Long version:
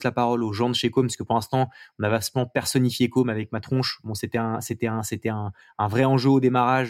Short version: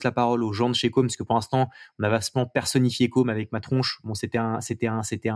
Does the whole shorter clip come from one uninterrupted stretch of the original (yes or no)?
yes